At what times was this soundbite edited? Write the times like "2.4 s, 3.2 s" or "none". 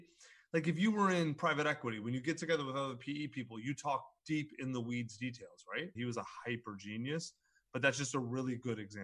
5.9 s

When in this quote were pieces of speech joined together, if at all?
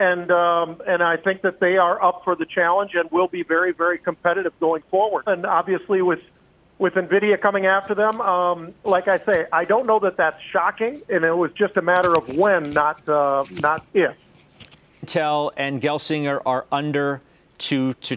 5.3 s, 15.0 s

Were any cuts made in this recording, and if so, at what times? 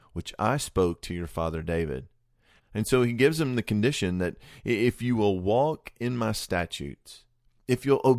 2.6 s

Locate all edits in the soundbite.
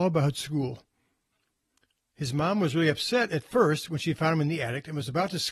none

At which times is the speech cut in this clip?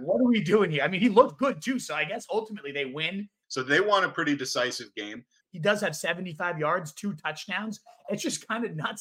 3.4 s, 5.4 s

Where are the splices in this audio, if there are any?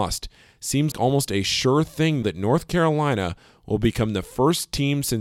0.9 s, 2.2 s

